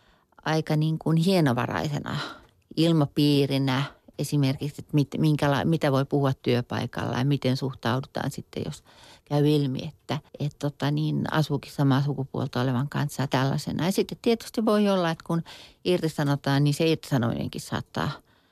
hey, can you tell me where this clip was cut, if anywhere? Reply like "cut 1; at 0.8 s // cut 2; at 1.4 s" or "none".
cut 1; at 10.3 s